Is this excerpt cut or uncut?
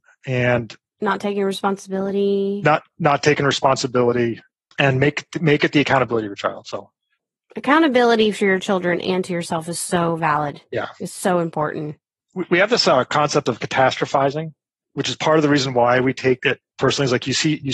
uncut